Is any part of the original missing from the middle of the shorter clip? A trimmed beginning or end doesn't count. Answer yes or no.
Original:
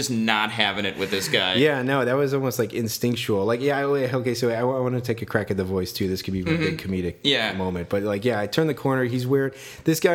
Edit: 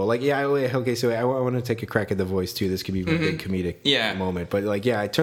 no